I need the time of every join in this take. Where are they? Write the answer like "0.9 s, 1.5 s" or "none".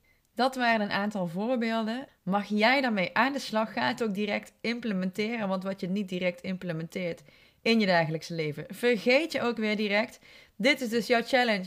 2.1 s